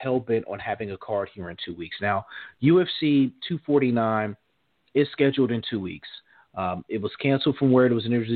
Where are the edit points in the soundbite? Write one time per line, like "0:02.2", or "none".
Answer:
none